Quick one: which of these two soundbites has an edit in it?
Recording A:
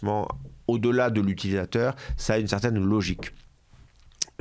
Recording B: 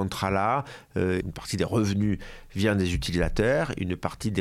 B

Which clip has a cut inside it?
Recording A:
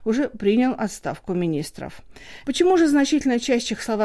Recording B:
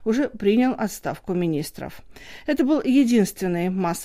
A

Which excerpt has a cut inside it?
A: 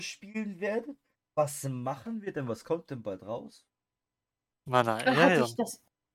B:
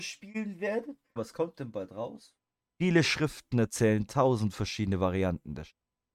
B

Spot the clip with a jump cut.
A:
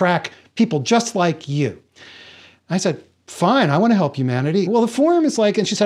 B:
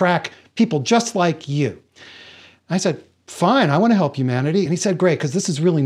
A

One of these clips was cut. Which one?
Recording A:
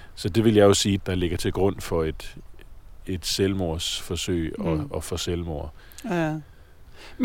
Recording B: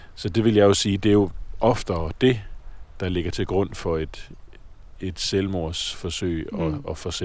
A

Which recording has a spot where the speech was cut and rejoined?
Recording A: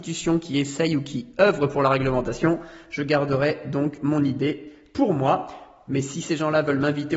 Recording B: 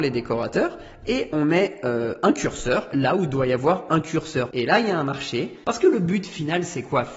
B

